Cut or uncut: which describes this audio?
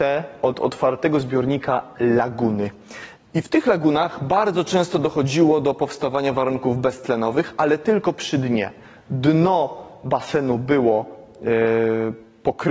uncut